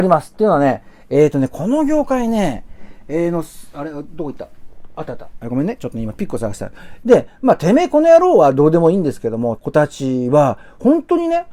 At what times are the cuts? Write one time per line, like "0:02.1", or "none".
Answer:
0:07.0
0:09.6